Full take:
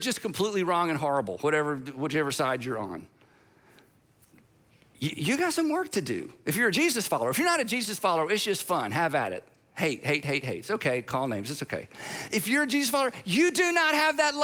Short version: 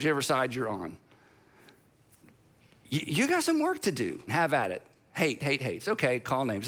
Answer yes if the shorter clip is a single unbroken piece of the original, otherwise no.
no